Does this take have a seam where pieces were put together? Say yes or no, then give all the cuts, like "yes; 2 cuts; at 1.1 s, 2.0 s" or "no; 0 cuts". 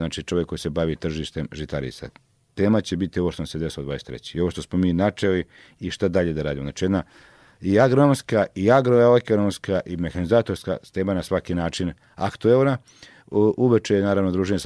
no; 0 cuts